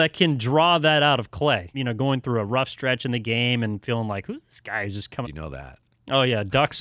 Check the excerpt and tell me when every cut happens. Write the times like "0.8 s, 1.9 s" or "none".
1.7 s, 5.2 s